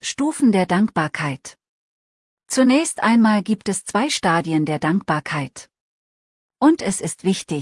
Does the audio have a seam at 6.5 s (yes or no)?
no